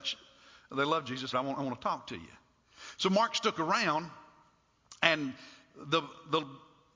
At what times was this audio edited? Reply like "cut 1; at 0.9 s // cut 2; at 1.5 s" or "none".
cut 1; at 1.3 s